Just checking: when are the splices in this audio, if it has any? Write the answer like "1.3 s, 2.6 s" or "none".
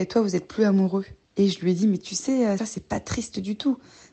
2.6 s